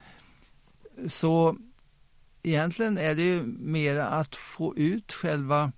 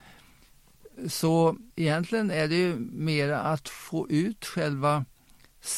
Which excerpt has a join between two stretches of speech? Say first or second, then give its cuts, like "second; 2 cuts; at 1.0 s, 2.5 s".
second; 1 cut; at 1.7 s